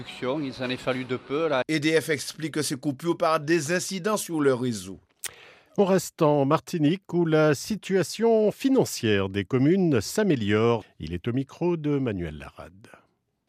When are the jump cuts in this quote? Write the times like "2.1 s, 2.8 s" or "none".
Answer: 1.6 s, 10.8 s